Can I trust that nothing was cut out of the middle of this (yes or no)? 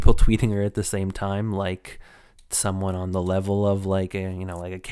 yes